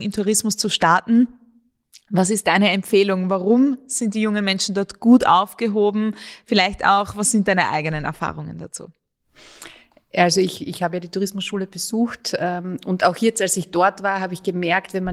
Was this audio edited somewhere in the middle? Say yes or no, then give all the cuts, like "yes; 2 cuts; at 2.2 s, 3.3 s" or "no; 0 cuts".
no; 0 cuts